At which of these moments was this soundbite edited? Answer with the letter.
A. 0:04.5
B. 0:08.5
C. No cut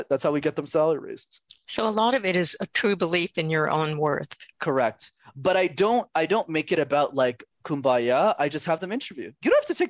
A